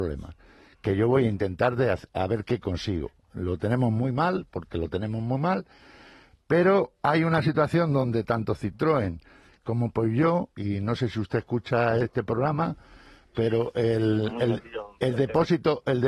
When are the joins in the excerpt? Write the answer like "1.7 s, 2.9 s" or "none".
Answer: none